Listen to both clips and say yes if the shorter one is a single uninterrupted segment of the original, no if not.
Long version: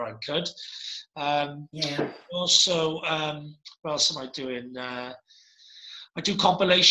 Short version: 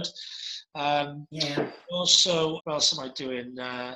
no